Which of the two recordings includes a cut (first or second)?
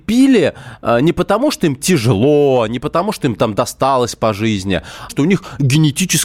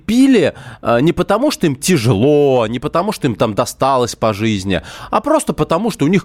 first